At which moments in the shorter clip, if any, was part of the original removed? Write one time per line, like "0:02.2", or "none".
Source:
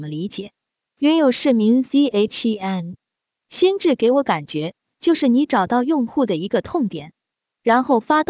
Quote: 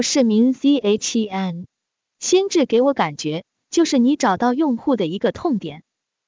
none